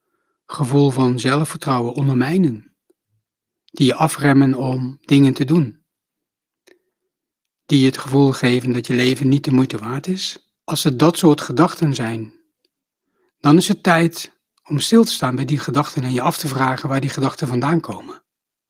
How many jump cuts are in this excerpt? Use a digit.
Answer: 1